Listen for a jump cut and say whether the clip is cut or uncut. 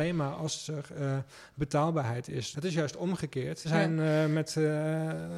cut